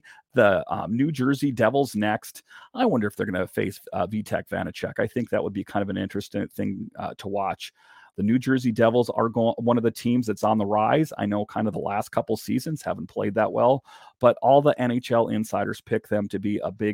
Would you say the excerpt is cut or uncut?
uncut